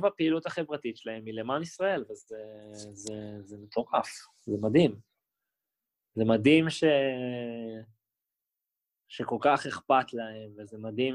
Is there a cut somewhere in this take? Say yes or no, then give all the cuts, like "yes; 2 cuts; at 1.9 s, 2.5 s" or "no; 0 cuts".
no; 0 cuts